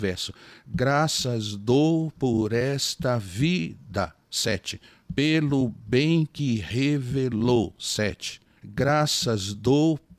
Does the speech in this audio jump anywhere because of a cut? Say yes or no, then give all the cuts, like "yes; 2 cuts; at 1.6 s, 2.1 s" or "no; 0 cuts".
no; 0 cuts